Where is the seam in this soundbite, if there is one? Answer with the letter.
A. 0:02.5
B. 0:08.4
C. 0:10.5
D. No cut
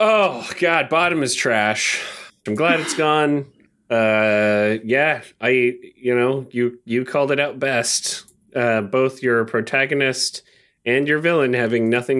A